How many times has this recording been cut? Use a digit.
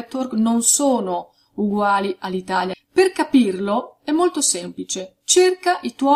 1